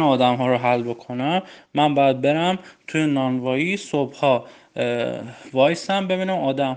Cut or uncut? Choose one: uncut